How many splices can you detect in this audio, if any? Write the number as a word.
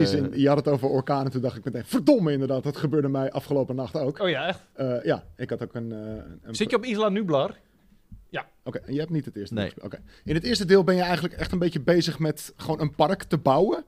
one